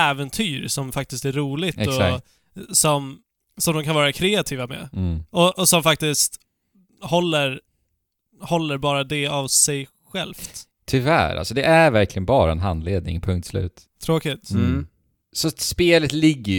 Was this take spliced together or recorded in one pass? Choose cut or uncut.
cut